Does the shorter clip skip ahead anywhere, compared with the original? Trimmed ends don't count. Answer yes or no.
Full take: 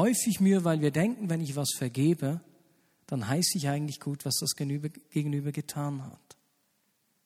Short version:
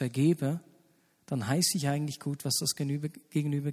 no